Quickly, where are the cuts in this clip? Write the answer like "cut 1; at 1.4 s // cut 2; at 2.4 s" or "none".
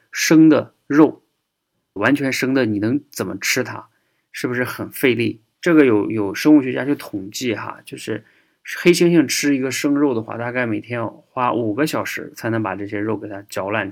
cut 1; at 2.0 s // cut 2; at 5.5 s